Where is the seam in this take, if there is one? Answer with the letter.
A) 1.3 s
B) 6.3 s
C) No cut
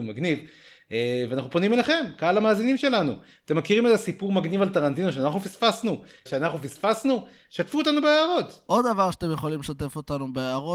B